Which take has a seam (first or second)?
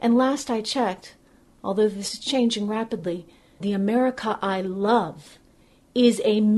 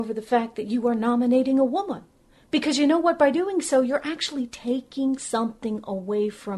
first